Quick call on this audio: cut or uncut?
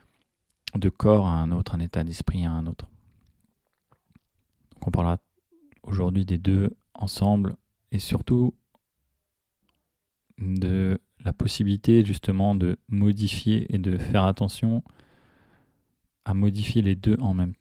cut